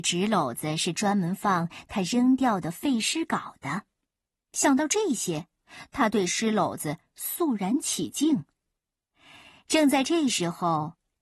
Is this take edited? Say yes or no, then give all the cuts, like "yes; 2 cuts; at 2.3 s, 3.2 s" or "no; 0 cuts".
no; 0 cuts